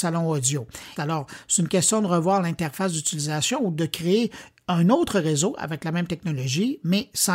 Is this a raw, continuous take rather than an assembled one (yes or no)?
no